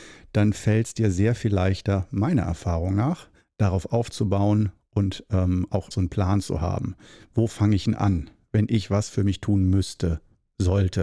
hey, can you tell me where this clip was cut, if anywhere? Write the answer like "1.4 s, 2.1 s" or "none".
5.9 s